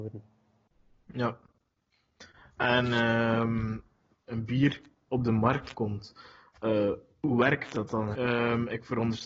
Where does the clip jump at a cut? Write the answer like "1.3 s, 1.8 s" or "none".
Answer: 4.3 s, 8.1 s